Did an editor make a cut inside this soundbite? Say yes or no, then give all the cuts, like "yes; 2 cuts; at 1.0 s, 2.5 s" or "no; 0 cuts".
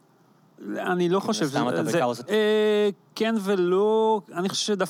yes; 1 cut; at 2.3 s